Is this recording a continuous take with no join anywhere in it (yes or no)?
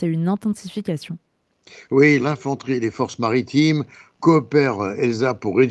no